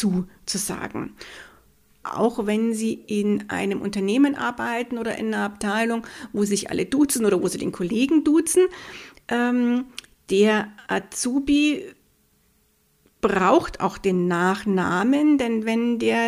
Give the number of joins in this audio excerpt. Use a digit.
1